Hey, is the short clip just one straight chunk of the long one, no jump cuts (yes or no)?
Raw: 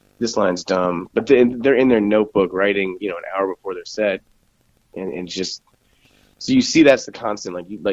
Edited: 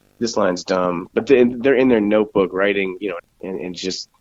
no